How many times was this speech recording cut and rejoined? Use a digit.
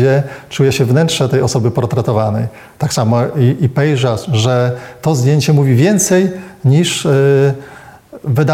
1